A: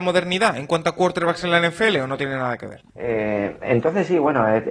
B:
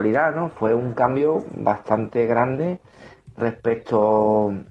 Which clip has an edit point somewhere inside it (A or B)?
A